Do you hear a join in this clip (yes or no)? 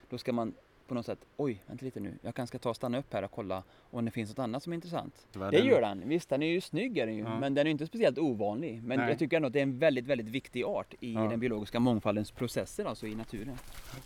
yes